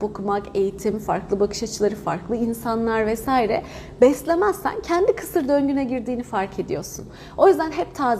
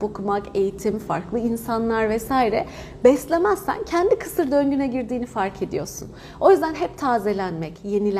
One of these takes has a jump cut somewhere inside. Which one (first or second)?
second